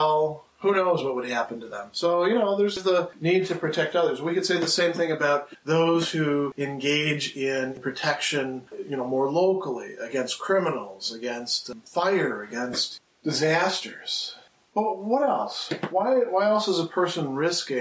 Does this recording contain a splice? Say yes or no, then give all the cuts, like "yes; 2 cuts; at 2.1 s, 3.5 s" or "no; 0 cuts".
no; 0 cuts